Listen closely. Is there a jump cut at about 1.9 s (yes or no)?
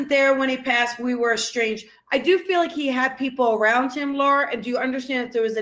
no